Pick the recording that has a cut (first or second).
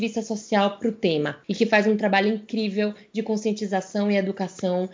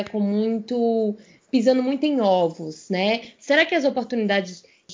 second